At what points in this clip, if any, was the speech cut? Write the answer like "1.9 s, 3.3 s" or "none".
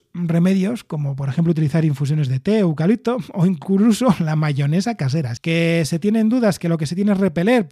5.4 s